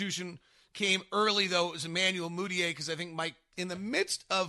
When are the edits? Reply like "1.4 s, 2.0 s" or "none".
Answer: 3.5 s

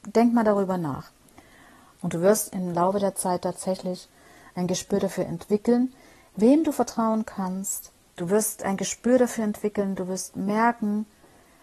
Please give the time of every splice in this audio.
1.9 s, 8.1 s

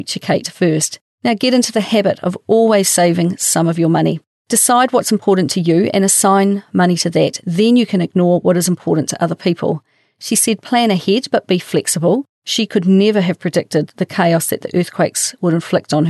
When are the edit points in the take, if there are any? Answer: none

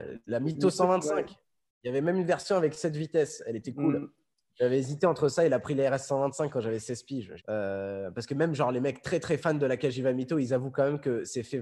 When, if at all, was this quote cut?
7.4 s

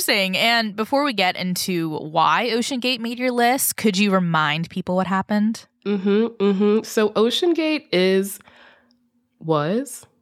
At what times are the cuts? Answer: none

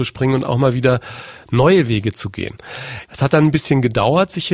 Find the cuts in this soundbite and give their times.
3.1 s

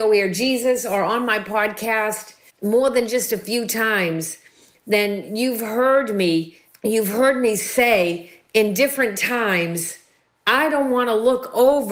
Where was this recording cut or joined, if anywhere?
2.5 s

